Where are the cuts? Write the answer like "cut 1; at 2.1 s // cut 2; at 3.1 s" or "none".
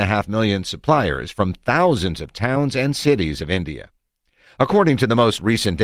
none